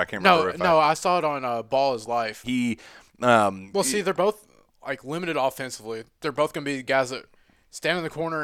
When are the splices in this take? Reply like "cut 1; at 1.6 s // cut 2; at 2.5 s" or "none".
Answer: cut 1; at 2.4 s